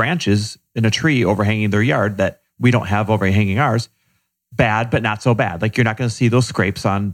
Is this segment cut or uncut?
uncut